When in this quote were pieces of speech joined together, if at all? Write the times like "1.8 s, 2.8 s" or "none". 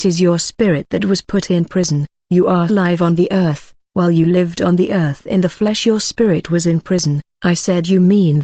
2.7 s

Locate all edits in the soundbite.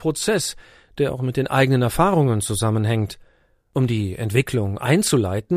none

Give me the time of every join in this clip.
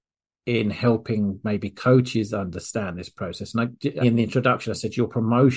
4.0 s

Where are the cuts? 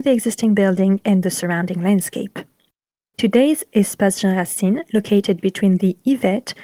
3.1 s

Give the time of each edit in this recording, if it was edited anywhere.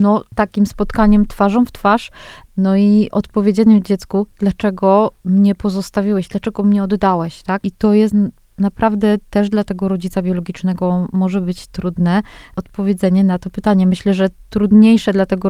7.6 s

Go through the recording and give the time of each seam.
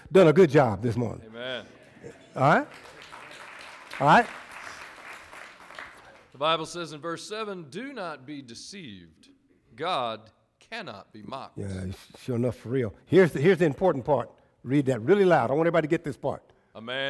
none

